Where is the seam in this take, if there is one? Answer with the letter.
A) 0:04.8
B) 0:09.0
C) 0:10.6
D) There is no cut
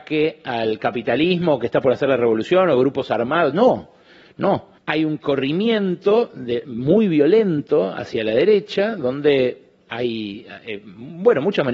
A